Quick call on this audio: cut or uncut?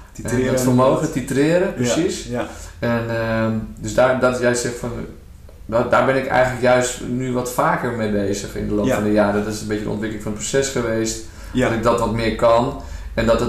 uncut